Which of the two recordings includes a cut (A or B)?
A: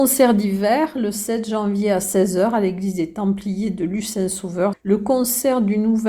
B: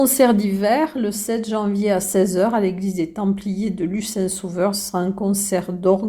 A